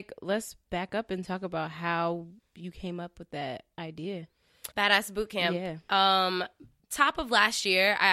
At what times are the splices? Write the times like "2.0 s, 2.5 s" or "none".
4.7 s, 6.8 s